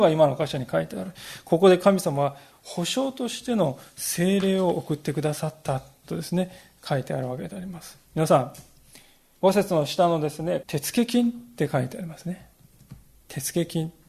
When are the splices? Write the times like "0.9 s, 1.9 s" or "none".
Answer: 9.4 s, 10.6 s